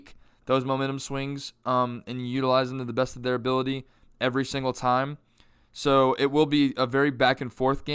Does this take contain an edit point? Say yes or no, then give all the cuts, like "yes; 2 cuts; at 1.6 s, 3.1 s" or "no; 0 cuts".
no; 0 cuts